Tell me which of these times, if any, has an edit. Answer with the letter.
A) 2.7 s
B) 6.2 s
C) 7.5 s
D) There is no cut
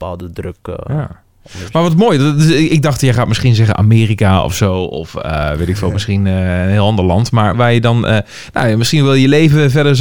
C